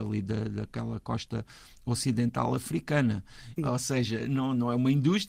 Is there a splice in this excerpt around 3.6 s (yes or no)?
yes